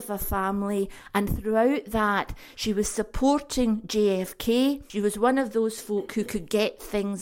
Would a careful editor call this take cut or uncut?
cut